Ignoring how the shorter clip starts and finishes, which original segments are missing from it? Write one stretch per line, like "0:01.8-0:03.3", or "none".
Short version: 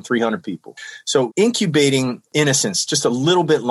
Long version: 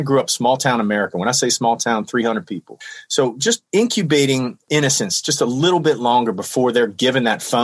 0:03.3-0:03.7